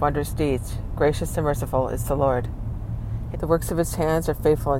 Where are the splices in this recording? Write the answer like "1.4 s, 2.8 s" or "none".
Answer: 3.3 s

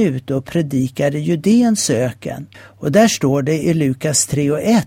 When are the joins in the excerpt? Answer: 2.5 s

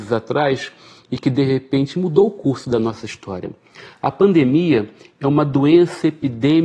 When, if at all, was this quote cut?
none

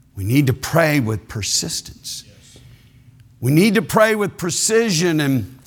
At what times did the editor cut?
none

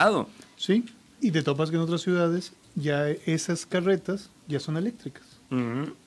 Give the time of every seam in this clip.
1.2 s

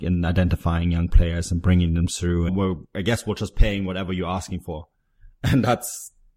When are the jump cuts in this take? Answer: 2.5 s

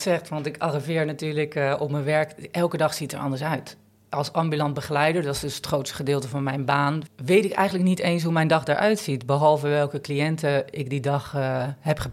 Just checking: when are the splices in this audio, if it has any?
7.1 s

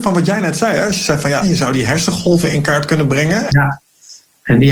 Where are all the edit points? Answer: 1.4 s, 3.5 s

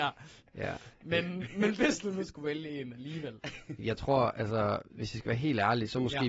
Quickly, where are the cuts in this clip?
none

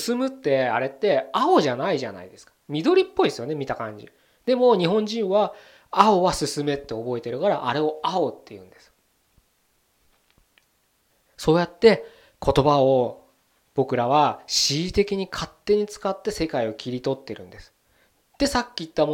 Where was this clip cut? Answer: 11.3 s

